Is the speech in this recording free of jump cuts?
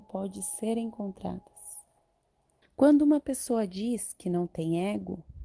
no; 1 cut; at 2.6 s

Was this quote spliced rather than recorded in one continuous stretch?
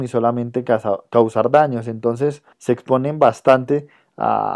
yes; 1 cut; at 2.5 s

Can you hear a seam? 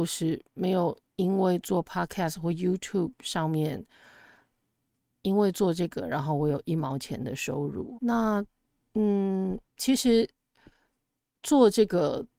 yes; 2 cuts; at 8.0 s, 9.7 s

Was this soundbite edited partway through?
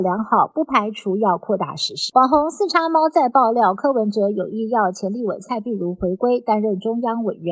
yes; 1 cut; at 2.1 s

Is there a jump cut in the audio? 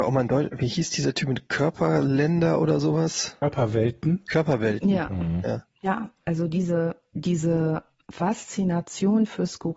no; 0 cuts

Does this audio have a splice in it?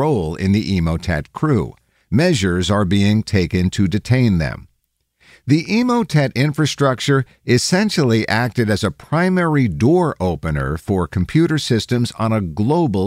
yes; 1 cut; at 2.0 s

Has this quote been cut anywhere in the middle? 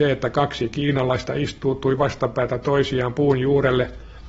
no; 0 cuts

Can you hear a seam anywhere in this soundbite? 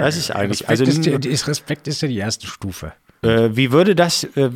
yes; 1 cut; at 3.2 s

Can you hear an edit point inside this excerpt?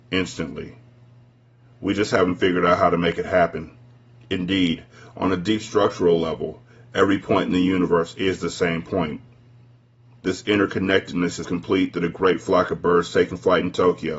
yes; 1 cut; at 11.4 s

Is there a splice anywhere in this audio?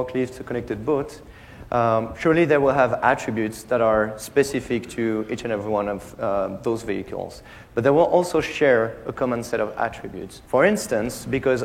yes; 1 cut; at 10.5 s

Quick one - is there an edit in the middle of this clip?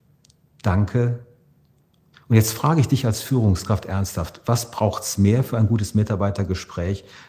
yes; 1 cut; at 2.1 s

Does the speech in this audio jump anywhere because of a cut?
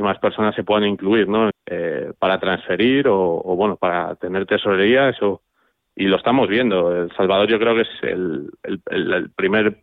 yes; 1 cut; at 1.5 s

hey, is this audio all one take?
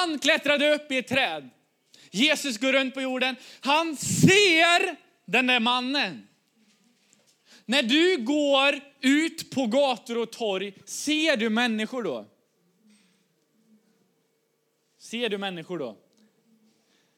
yes; 0 cuts

